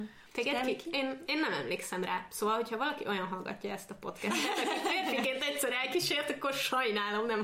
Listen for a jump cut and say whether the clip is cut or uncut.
cut